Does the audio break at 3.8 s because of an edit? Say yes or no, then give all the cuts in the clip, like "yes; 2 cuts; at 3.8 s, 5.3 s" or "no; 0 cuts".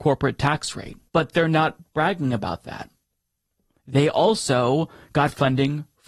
no; 1 cut; at 1.1 s